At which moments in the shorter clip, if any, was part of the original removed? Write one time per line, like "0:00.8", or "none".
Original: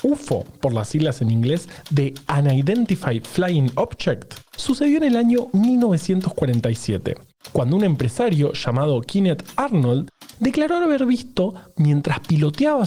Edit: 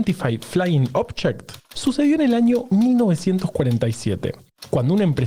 none

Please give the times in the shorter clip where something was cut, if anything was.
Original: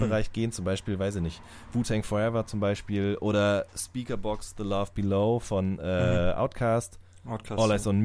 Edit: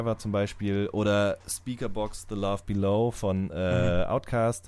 none

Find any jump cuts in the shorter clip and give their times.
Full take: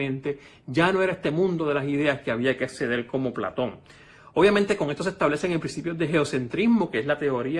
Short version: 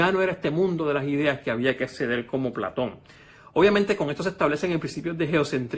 none

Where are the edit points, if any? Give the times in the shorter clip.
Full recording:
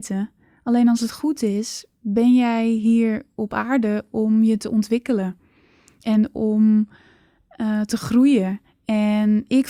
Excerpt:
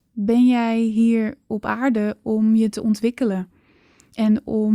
none

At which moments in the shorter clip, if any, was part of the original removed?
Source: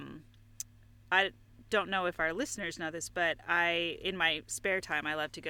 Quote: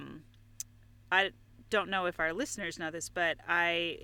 none

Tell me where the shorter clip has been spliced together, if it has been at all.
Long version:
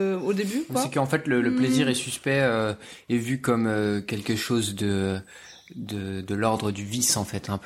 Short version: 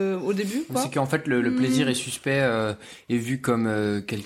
none

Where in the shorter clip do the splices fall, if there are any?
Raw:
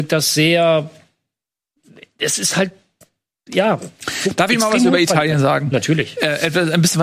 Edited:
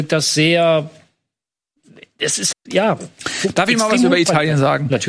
0:02.5

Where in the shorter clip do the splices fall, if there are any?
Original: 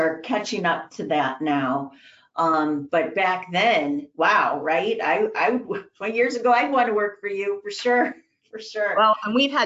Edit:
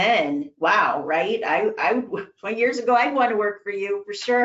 none

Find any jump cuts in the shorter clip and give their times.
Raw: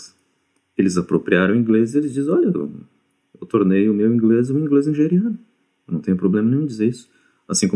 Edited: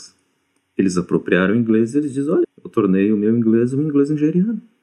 0:02.4

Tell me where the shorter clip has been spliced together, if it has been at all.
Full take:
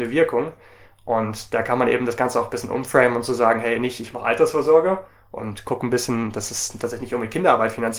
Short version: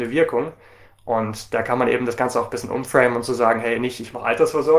none

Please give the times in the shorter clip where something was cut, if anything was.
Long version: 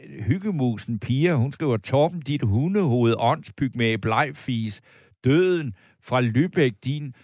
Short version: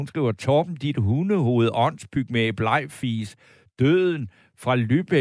none

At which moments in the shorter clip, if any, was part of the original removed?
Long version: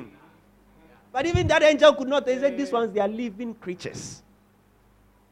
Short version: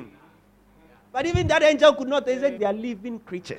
0:02.6

